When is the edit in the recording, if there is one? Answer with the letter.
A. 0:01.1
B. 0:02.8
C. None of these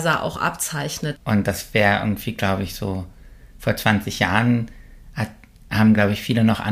A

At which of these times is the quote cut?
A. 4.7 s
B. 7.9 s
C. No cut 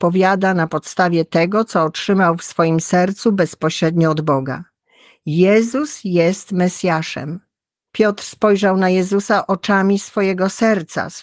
B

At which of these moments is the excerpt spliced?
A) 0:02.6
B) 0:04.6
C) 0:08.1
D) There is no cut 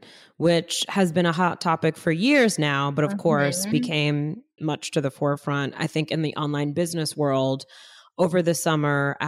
B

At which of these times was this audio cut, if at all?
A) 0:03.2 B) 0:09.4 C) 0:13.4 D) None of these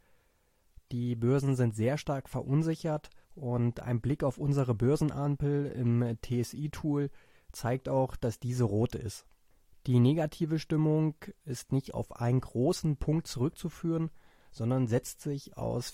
A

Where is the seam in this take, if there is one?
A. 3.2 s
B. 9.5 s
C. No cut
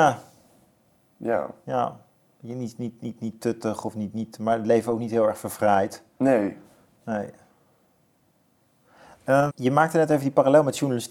B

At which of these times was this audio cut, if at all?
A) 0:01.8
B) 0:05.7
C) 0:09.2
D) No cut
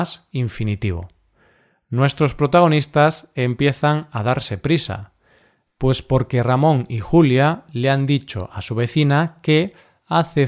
B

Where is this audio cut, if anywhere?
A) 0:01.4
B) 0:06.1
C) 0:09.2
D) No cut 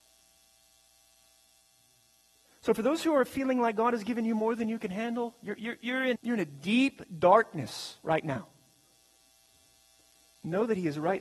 B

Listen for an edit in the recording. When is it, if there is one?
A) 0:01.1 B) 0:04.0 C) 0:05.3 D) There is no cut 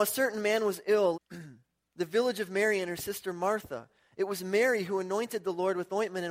A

